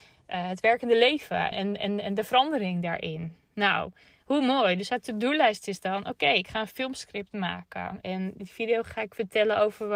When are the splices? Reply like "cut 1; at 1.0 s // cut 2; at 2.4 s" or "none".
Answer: cut 1; at 1.5 s // cut 2; at 8.0 s